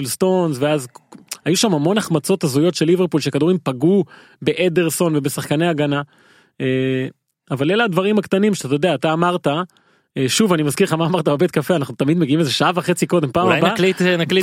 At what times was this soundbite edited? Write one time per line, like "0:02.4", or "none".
none

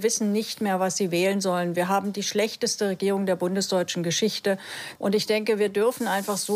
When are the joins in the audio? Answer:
0:05.0

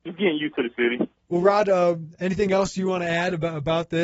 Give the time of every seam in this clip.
0:01.2

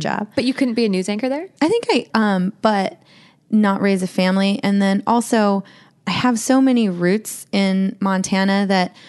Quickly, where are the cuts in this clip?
0:02.1

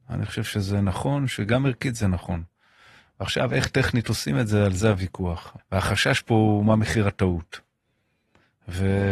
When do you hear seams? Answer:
0:05.6

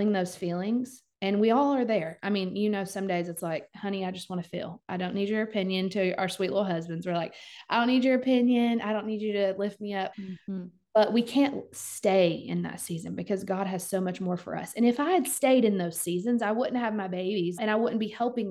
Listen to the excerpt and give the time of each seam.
0:10.1
0:17.6

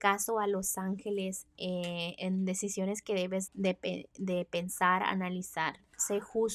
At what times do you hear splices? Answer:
0:03.5

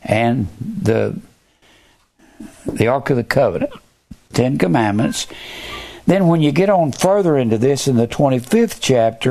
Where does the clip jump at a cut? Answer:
0:04.3

